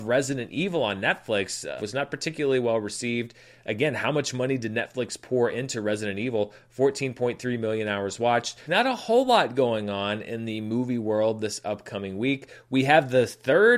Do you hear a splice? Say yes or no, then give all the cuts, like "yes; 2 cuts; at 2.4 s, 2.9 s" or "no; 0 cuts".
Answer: yes; 2 cuts; at 1.8 s, 8.7 s